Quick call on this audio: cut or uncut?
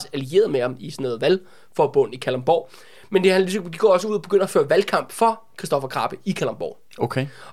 uncut